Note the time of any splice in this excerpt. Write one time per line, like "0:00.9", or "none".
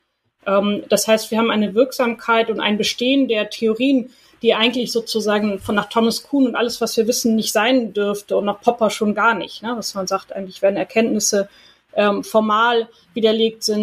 none